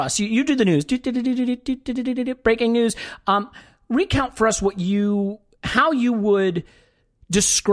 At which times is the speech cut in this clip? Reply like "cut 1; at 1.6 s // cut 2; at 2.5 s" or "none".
none